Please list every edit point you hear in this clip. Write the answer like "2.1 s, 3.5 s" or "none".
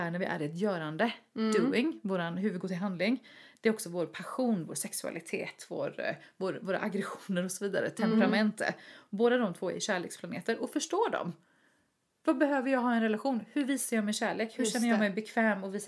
none